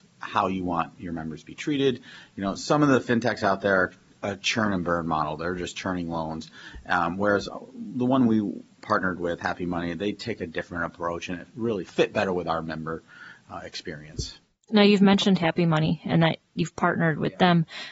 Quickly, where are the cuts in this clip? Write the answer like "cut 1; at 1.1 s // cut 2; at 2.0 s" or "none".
none

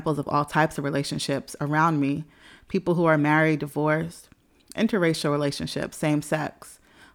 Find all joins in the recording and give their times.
none

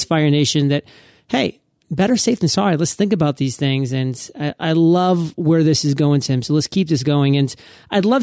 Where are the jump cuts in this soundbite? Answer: none

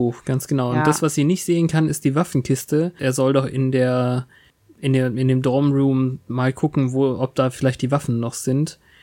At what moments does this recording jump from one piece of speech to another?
cut 1; at 3.0 s

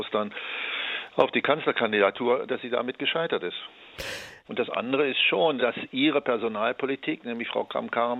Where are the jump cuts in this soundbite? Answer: cut 1; at 4.4 s // cut 2; at 5.6 s

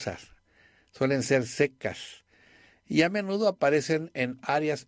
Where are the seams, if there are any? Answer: none

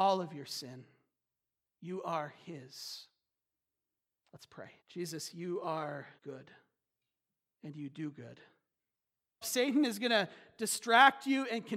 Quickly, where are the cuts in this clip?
cut 1; at 4.8 s // cut 2; at 6.2 s // cut 3; at 9.4 s

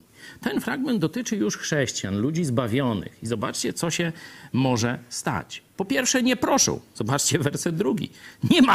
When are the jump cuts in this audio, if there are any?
none

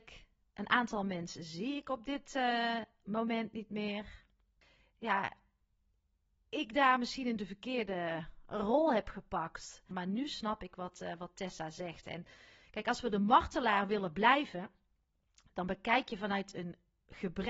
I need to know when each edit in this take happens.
cut 1; at 9.9 s

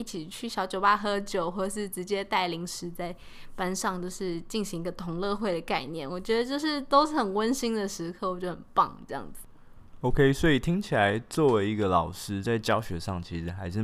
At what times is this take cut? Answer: none

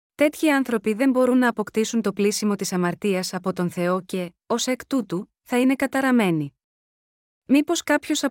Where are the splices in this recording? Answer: none

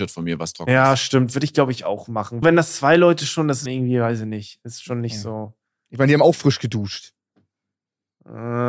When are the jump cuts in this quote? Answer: cut 1; at 2.4 s // cut 2; at 3.7 s

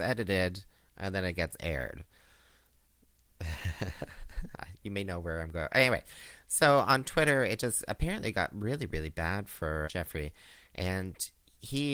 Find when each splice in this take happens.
cut 1; at 9.8 s

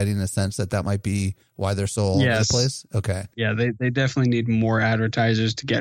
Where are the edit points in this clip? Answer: cut 1; at 3.3 s

